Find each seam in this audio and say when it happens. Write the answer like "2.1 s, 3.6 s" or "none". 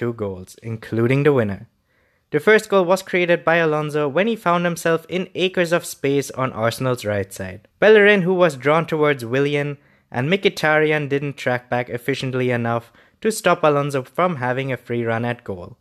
7.7 s

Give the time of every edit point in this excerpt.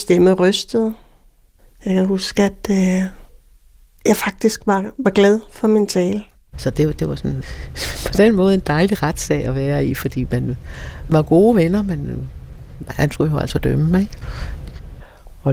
6.5 s

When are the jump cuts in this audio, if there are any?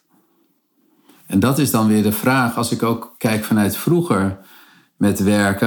none

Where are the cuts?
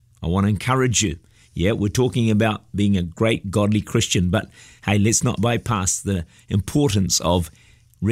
none

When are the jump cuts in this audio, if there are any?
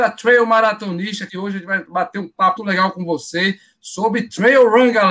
1.3 s, 2.6 s

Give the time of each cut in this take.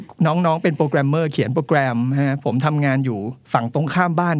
3.4 s

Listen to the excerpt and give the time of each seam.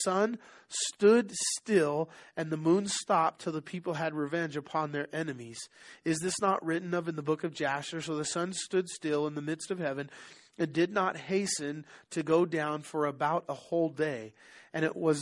none

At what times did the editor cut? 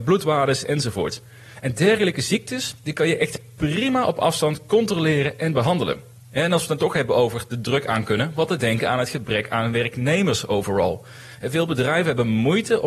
6.2 s

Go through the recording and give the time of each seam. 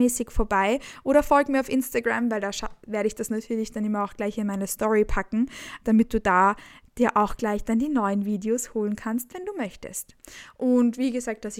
5.8 s

